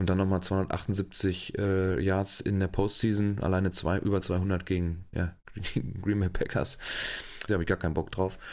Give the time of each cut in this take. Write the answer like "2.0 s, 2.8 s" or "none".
5.1 s, 7.5 s